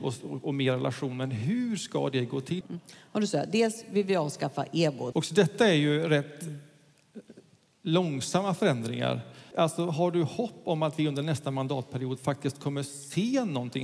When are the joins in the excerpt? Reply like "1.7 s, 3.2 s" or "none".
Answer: 2.6 s, 5.1 s, 9.5 s